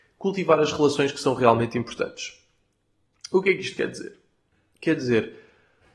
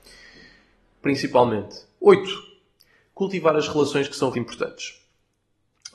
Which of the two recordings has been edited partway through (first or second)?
second